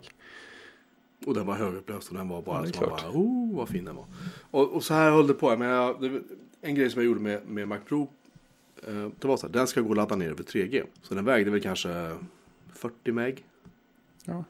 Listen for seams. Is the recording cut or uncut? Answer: cut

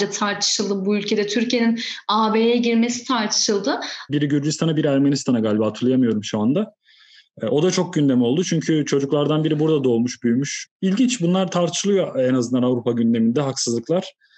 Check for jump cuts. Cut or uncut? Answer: cut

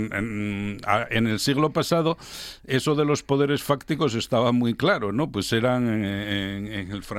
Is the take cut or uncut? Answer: uncut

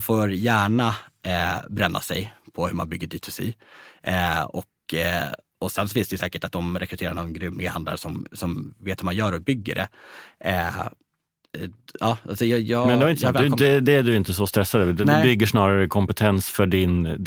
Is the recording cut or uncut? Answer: uncut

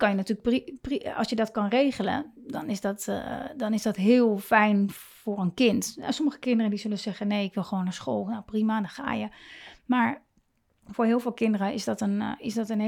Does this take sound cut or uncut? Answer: uncut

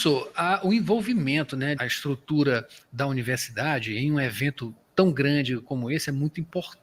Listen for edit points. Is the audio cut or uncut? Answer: cut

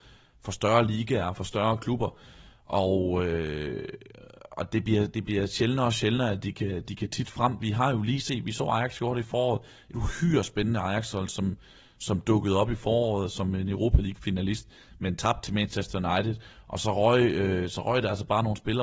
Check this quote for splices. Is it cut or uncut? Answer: uncut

